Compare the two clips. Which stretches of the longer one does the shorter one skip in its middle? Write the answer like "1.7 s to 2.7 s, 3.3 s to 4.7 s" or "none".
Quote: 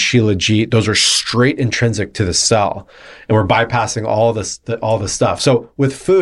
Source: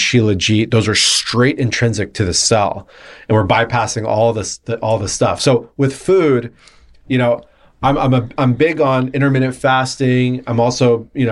none